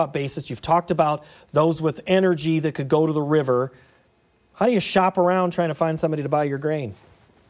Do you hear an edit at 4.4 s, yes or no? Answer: no